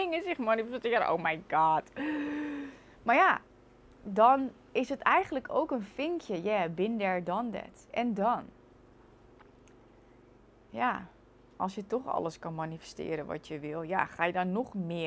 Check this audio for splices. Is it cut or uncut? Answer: uncut